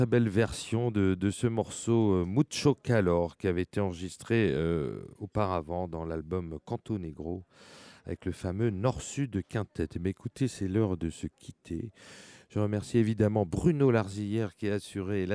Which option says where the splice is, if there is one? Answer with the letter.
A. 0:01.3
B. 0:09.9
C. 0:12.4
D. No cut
C